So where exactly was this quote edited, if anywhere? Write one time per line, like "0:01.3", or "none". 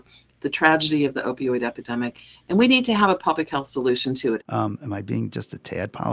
0:04.4